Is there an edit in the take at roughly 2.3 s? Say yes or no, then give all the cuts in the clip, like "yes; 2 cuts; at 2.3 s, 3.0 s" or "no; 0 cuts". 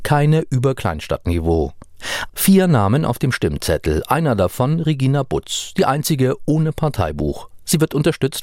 yes; 1 cut; at 2.3 s